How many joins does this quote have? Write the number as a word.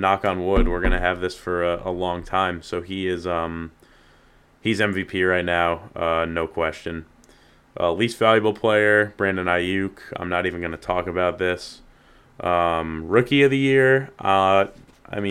zero